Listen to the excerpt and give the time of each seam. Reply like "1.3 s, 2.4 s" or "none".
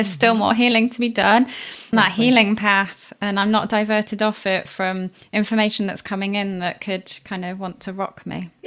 1.9 s